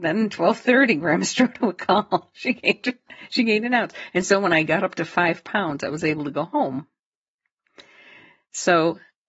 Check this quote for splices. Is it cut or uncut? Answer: uncut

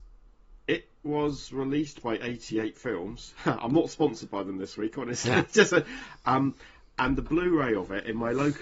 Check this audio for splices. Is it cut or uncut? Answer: uncut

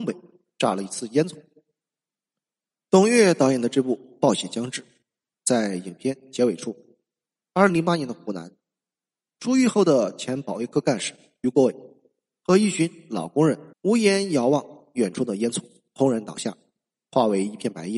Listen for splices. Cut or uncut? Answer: cut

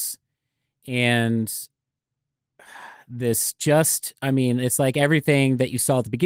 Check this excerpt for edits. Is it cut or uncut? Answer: uncut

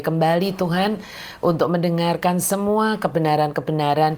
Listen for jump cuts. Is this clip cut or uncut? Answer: uncut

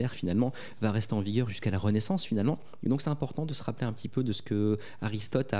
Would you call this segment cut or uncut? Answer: uncut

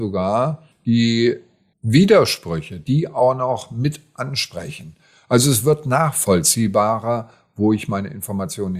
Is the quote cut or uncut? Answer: cut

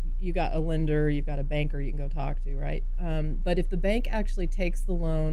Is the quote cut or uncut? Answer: uncut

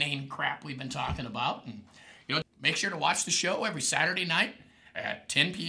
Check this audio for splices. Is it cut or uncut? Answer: cut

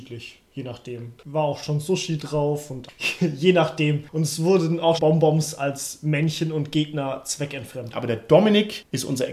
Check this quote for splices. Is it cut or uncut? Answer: cut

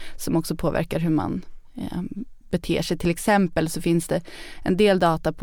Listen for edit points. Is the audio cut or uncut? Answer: uncut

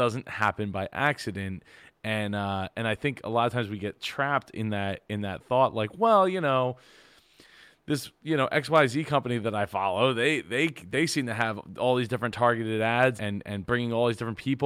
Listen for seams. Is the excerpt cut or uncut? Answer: cut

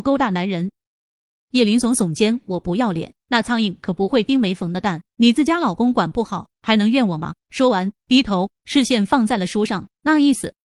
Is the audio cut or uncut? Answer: uncut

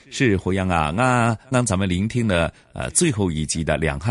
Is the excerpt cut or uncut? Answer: cut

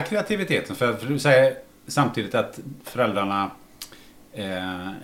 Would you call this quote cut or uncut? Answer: uncut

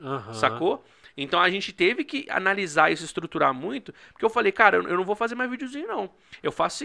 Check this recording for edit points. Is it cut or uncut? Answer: uncut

